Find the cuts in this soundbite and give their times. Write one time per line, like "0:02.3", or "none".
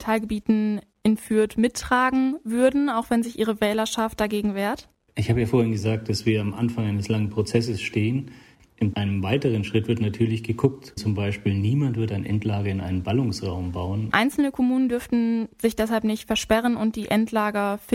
0:11.0
0:14.1